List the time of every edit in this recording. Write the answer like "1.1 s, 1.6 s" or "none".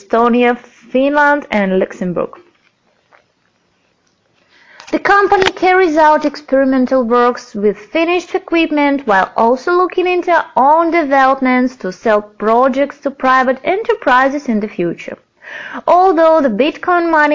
none